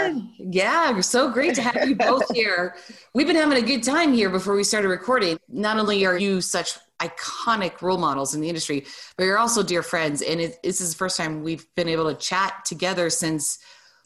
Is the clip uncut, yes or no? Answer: yes